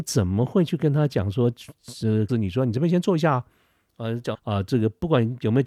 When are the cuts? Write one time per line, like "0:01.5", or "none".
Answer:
0:02.3
0:04.3